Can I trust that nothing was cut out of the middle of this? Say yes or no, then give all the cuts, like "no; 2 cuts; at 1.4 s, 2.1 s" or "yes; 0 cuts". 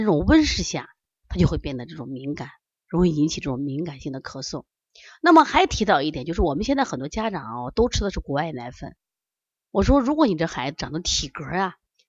yes; 0 cuts